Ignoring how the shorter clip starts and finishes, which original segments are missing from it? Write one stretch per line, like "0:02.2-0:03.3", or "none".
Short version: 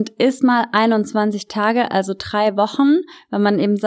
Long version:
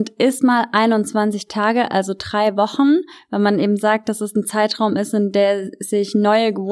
none